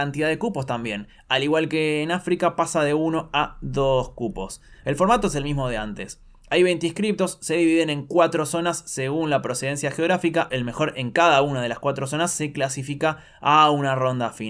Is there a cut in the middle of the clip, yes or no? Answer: no